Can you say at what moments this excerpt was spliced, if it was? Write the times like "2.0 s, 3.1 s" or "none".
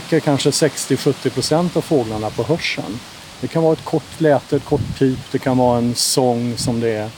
none

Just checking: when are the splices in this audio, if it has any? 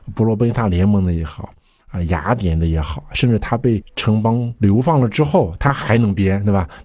none

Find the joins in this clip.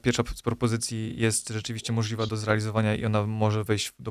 2.3 s

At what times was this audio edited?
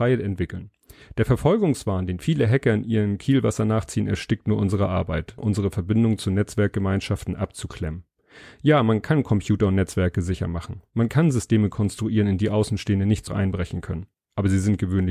5.4 s, 13.3 s

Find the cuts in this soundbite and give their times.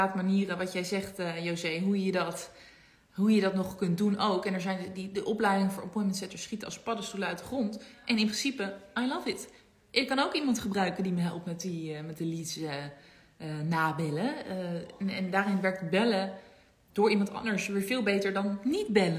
none

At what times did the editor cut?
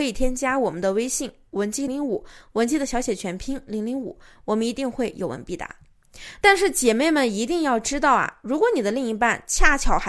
1.9 s, 6.4 s

